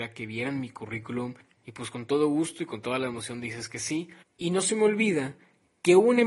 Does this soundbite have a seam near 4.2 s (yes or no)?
yes